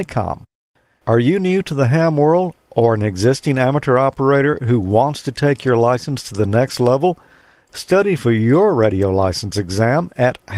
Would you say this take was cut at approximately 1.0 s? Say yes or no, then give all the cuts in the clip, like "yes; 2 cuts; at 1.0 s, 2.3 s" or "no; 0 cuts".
yes; 1 cut; at 1.0 s